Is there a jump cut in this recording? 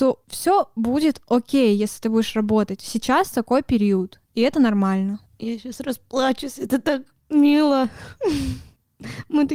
no; 0 cuts

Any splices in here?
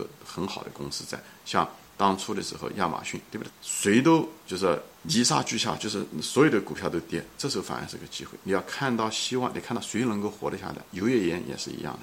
yes; 2 cuts; at 3.5 s, 5.0 s

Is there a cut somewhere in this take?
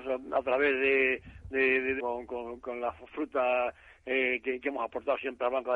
yes; 1 cut; at 2.0 s

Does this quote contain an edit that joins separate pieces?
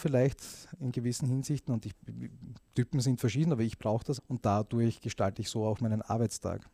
yes; 1 cut; at 4.2 s

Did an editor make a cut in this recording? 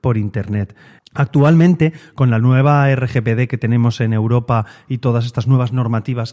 yes; 1 cut; at 1.0 s

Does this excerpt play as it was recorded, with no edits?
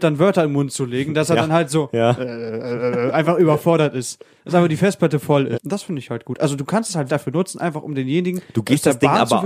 no; 2 cuts; at 5.5 s, 7.1 s

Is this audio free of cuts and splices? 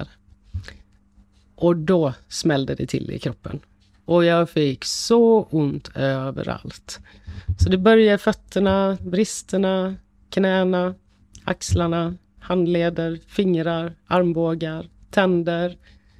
no; 1 cut; at 9.0 s

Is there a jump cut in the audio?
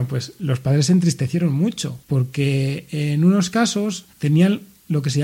yes; 1 cut; at 4.1 s

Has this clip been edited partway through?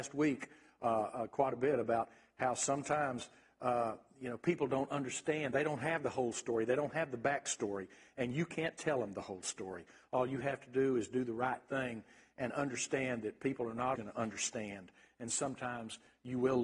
yes; 1 cut; at 14.0 s

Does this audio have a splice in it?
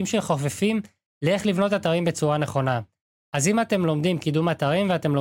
no; 0 cuts

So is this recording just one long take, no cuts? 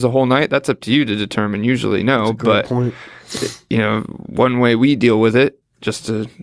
yes; 0 cuts

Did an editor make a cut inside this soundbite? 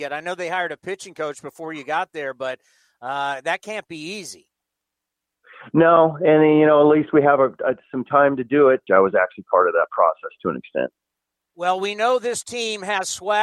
yes; 1 cut; at 8.9 s

